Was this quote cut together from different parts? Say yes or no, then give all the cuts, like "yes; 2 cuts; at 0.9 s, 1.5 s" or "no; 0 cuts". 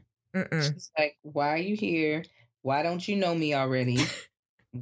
no; 0 cuts